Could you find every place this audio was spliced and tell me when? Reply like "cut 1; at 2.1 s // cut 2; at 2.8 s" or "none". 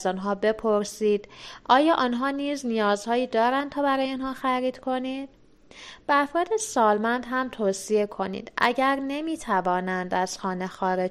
none